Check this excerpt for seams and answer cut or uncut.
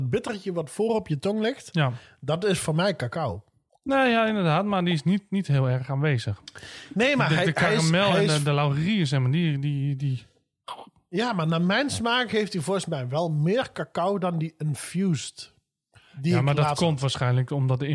cut